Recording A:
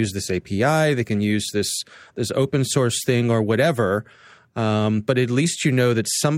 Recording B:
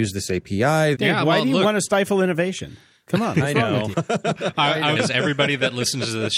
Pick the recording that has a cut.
B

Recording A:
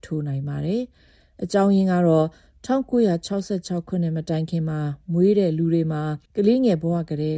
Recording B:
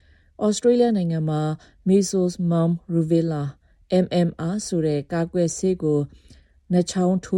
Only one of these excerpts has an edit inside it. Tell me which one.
A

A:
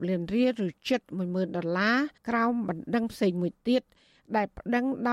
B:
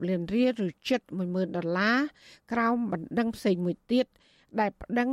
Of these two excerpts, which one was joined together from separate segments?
A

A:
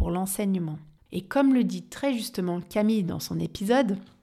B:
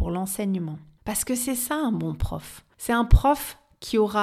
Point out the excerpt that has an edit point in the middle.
A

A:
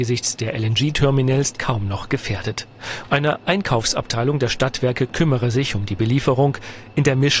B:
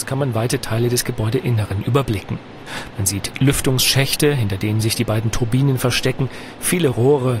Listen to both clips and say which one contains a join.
A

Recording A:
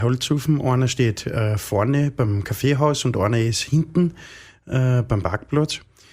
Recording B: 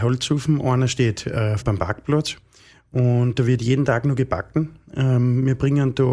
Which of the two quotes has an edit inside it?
B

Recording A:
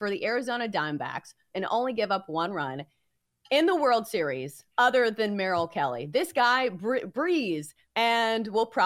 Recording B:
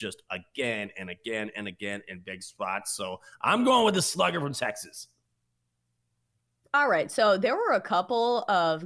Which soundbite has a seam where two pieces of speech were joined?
A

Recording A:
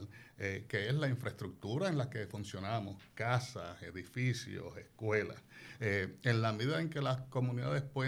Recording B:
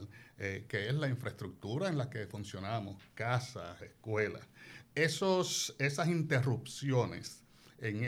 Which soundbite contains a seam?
B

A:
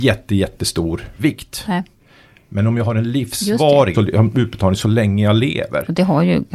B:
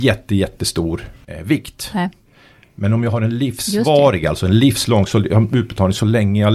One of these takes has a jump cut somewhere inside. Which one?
A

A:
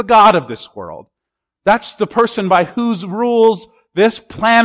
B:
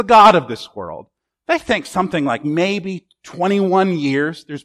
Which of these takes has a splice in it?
B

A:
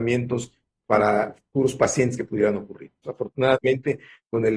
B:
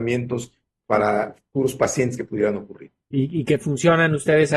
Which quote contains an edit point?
A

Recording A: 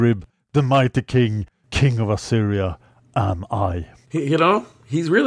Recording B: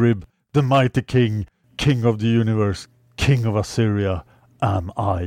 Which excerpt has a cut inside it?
A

